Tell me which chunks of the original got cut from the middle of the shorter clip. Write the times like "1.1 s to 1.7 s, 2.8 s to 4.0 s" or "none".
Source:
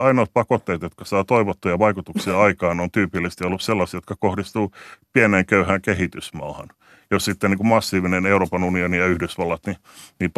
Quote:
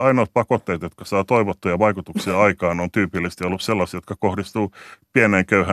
none

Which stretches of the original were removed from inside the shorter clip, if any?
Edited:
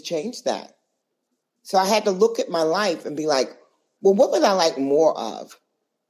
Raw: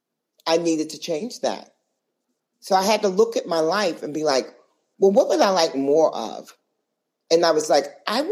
none

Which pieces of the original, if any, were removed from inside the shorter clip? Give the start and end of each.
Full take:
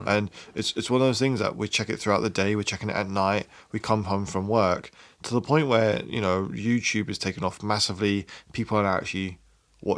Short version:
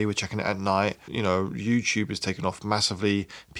3.6 s to 6.1 s

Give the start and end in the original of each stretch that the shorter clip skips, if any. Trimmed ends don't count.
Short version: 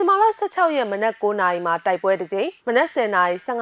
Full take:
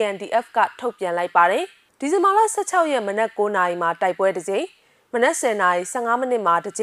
4.7 s to 5.0 s

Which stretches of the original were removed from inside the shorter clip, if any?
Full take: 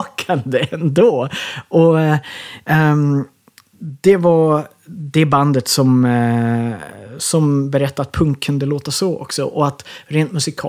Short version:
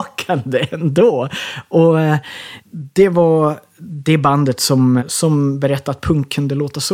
2.6 s to 3.7 s, 6.1 s to 7.1 s

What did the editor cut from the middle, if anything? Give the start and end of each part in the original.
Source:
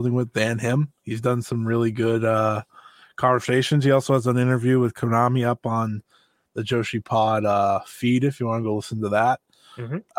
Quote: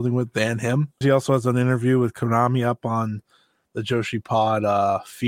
1.0 s to 3.8 s

